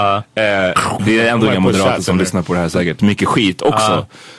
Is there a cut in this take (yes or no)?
yes